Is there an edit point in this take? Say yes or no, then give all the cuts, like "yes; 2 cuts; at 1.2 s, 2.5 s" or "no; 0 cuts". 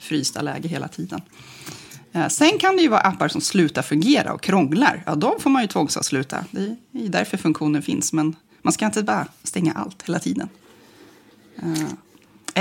no; 0 cuts